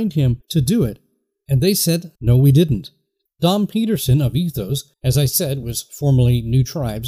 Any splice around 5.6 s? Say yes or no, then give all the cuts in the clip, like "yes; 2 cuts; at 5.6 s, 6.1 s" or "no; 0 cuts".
no; 0 cuts